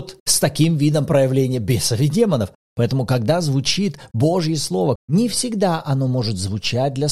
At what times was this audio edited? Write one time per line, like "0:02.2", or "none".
0:02.6
0:05.0